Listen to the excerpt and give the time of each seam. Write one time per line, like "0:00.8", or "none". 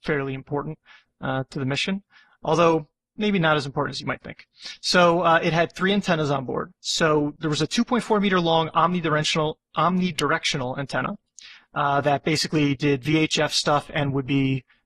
none